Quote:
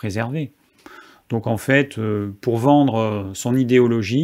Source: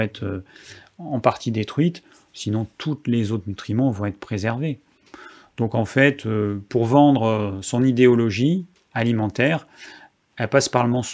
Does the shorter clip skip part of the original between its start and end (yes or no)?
no